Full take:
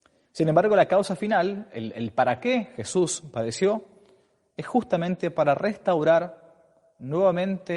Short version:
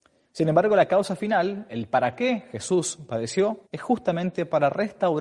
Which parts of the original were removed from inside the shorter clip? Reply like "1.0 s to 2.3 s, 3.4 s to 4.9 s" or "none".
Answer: 1.7 s to 1.9 s, 3.9 s to 4.5 s